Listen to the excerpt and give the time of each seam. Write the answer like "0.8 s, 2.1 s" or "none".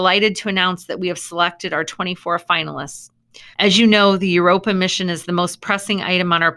3.5 s